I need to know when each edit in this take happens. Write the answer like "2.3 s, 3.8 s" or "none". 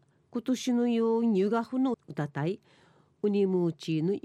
1.9 s